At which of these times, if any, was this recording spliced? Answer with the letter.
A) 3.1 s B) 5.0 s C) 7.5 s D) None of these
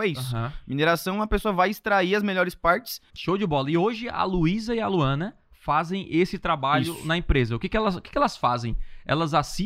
A